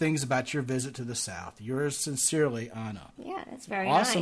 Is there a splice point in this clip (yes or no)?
yes